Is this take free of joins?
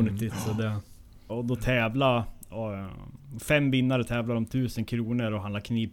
no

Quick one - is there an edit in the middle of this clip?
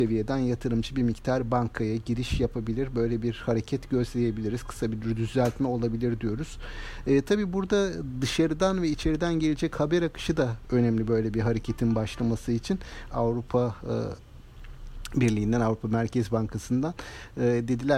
yes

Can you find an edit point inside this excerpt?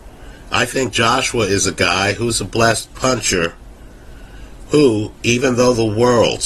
no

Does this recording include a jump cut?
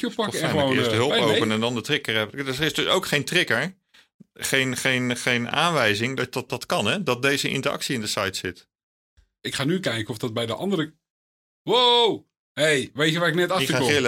yes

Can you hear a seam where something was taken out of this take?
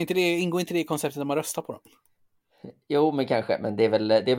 no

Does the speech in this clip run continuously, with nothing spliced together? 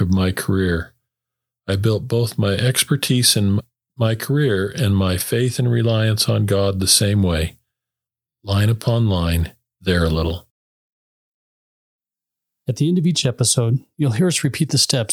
no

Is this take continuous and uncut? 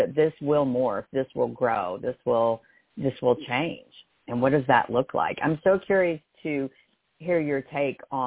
yes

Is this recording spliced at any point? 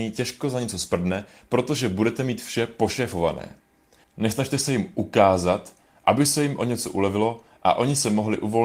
yes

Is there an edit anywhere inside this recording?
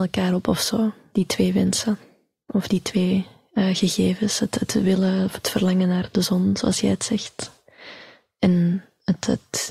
no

